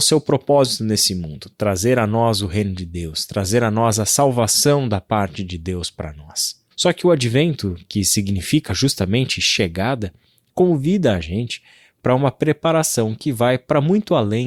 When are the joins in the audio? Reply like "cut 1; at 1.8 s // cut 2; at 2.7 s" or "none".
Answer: cut 1; at 6.7 s